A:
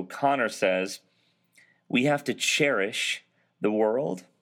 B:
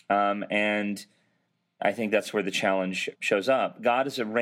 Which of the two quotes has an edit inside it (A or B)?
B